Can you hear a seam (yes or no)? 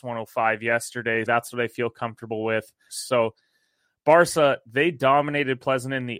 yes